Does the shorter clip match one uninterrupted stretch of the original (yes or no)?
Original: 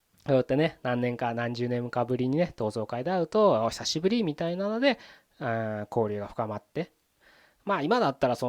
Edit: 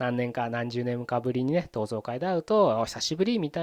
yes